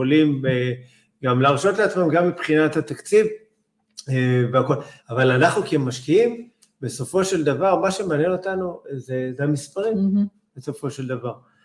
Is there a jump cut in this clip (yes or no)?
yes